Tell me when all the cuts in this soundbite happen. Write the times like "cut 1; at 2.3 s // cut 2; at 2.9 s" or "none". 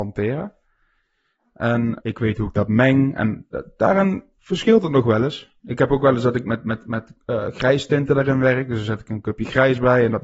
cut 1; at 2.0 s